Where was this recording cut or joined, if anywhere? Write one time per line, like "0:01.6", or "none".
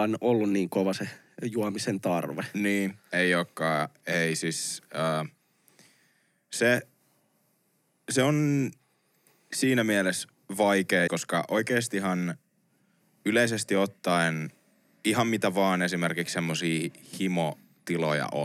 0:11.1